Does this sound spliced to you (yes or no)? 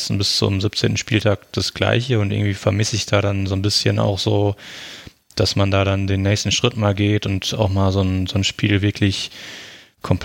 no